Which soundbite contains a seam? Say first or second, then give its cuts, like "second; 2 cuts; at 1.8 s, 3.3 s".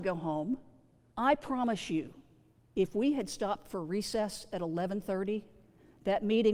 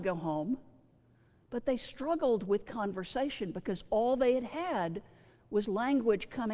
first; 1 cut; at 1.1 s